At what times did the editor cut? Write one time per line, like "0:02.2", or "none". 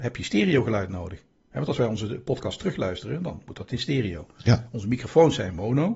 none

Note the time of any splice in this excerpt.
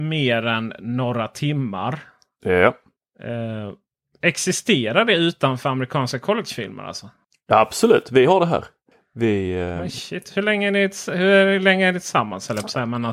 none

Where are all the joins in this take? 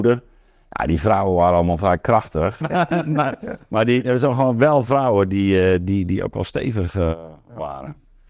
0:02.6

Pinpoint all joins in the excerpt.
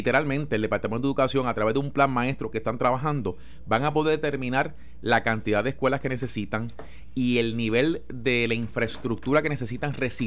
none

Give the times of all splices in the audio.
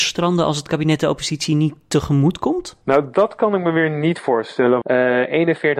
0:02.8
0:04.8

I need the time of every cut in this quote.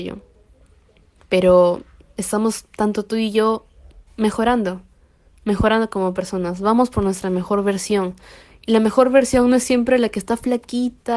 none

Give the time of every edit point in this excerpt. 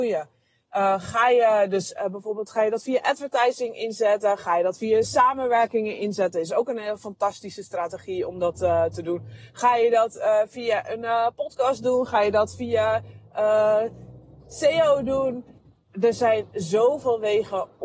none

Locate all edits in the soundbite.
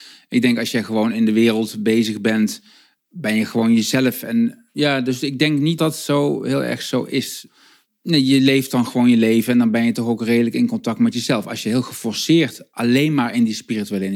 0:05.8

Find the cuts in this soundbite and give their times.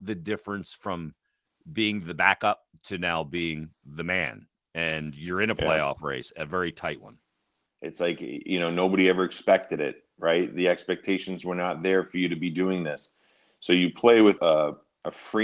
0:07.7
0:14.4

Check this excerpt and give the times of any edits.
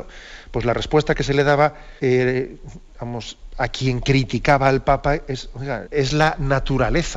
0:02.0
0:05.8

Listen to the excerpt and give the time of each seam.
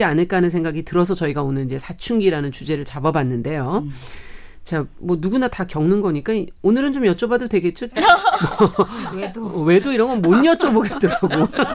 0:07.9

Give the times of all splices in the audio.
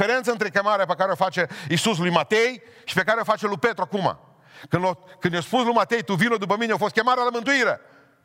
none

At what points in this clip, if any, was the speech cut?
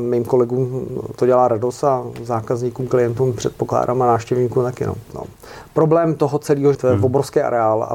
0:05.1
0:06.7

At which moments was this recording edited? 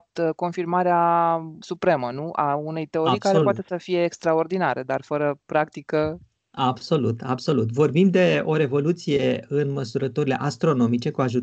none

